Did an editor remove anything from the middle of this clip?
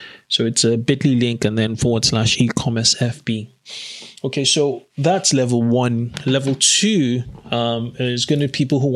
no; 0 cuts

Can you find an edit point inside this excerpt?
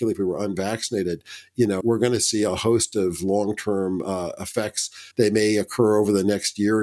yes; 2 cuts; at 1.8 s, 5.1 s

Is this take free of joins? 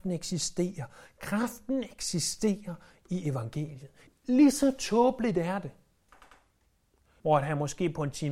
no; 2 cuts; at 4.1 s, 7.2 s

